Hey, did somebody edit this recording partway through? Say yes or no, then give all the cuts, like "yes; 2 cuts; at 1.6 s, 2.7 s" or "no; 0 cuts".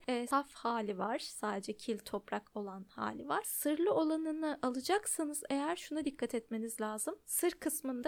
no; 0 cuts